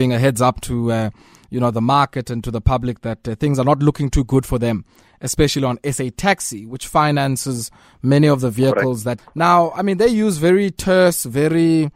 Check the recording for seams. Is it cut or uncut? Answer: cut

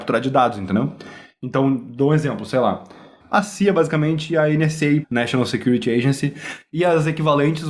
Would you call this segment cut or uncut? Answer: cut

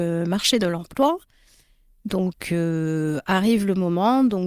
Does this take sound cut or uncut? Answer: uncut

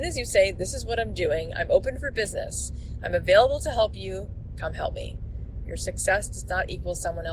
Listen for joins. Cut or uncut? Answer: cut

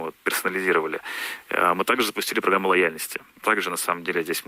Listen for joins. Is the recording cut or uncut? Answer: cut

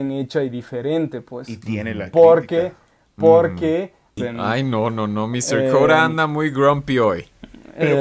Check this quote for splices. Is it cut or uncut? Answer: cut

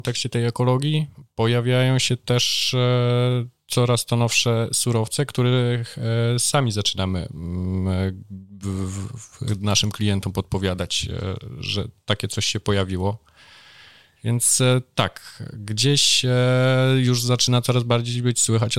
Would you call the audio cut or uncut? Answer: uncut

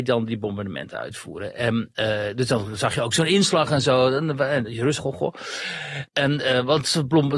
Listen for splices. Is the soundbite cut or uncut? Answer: cut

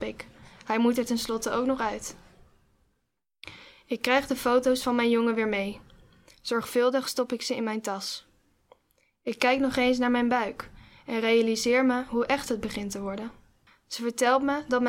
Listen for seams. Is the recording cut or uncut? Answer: cut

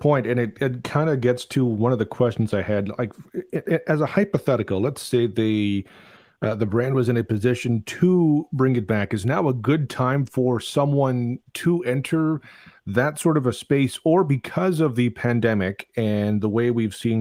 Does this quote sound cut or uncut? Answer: uncut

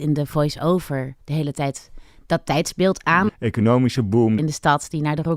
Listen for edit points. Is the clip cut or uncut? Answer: cut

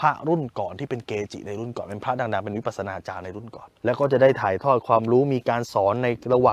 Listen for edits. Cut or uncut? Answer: cut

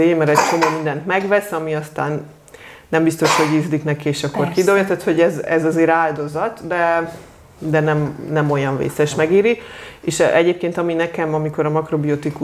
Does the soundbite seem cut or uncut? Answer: uncut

